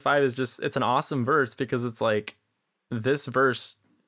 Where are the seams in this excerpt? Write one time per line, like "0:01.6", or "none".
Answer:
none